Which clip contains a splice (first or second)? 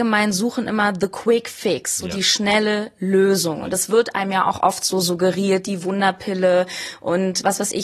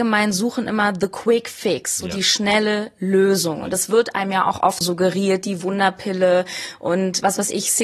second